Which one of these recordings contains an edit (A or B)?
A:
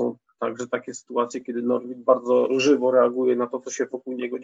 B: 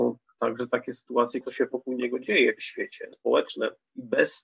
B